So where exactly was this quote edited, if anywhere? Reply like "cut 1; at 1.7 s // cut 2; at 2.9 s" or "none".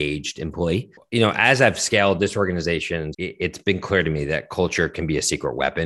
cut 1; at 1.0 s // cut 2; at 3.1 s